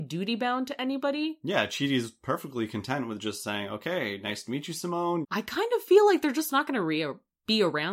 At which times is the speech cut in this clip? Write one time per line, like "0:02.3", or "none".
0:05.2

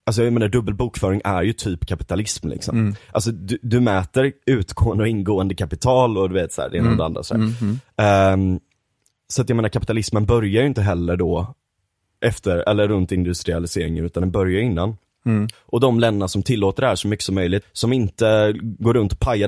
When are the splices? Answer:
0:15.5
0:17.6

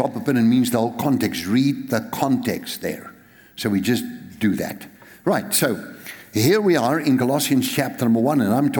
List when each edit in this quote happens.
none

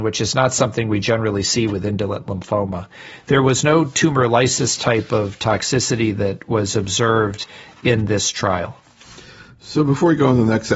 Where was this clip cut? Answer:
none

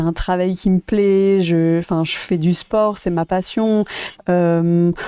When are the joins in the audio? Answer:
0:04.1

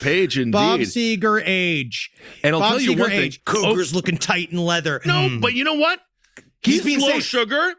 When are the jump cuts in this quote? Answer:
0:03.4
0:05.0

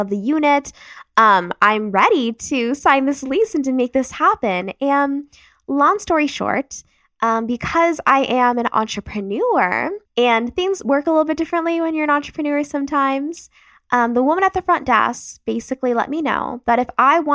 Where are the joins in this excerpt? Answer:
0:10.1

